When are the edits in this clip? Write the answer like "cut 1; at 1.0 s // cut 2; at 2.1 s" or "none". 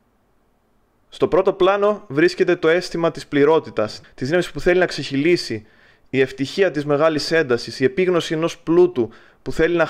cut 1; at 4.0 s